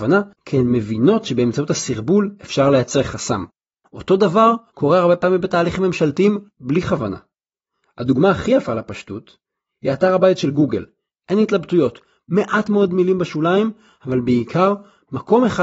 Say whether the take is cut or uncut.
uncut